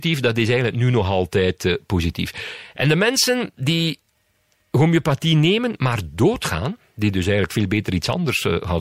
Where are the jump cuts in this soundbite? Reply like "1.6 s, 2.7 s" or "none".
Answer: none